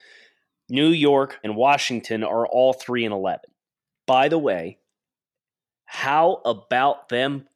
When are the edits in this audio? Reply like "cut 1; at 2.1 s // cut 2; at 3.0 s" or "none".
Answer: cut 1; at 1.4 s // cut 2; at 4.0 s